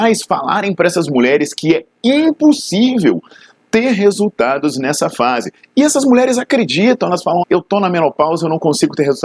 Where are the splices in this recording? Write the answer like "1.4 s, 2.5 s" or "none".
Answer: 7.4 s